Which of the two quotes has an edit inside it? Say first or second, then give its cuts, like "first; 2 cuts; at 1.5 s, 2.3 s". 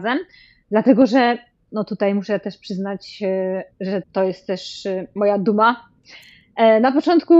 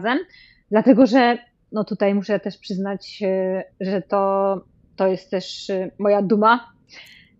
first; 1 cut; at 4.0 s